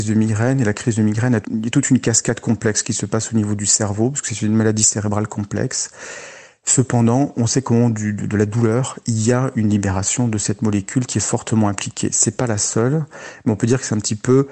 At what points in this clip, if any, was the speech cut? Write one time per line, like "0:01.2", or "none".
0:01.4